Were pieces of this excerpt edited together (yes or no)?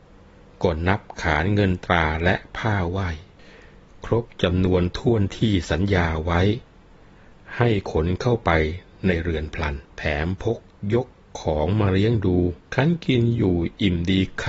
yes